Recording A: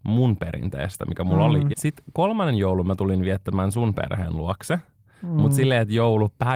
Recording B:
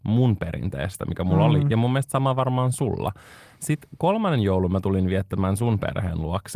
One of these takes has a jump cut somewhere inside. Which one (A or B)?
A